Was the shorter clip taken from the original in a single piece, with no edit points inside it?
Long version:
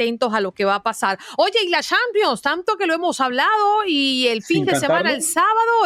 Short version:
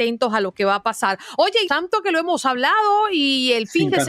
no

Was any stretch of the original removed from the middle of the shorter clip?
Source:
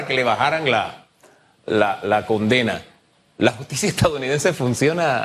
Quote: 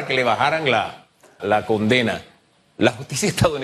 yes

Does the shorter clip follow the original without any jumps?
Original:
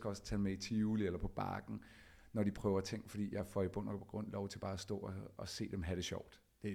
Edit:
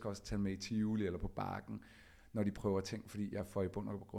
yes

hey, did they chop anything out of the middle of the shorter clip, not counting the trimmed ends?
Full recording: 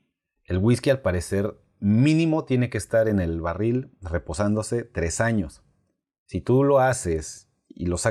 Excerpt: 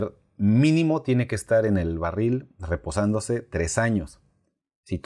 no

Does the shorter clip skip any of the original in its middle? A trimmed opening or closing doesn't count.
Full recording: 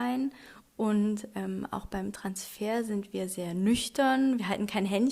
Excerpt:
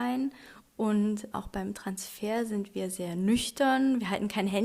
yes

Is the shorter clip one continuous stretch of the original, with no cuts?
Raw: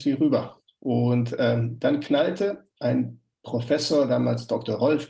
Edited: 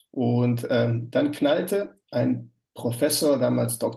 yes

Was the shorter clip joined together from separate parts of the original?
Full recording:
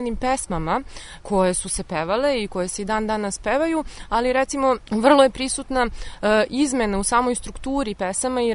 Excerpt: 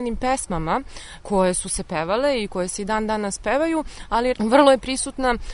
yes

